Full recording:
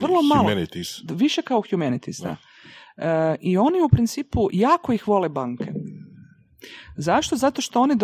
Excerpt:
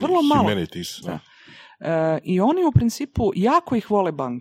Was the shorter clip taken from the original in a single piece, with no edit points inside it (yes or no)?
no